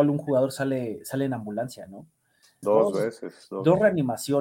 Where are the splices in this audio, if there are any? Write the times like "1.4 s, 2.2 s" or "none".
2.6 s